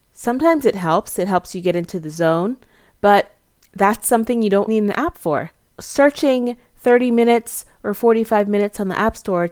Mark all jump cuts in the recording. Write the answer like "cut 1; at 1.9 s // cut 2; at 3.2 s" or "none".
cut 1; at 4.7 s